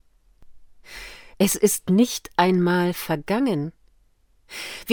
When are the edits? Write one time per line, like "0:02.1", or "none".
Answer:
0:01.3